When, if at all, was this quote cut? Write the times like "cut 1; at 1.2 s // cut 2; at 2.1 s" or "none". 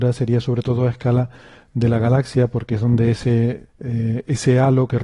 cut 1; at 3.7 s